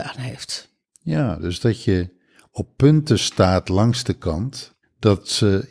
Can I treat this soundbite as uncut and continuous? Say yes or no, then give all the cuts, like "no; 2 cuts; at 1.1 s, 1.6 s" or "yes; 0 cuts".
yes; 0 cuts